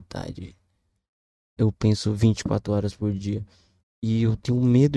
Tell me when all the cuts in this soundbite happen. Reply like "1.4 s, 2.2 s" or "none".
1.6 s, 3.8 s